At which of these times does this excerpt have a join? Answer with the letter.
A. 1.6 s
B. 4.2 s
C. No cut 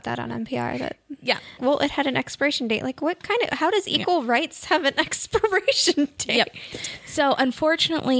A